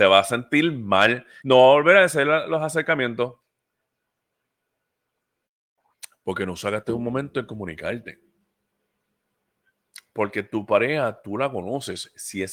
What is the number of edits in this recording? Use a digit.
1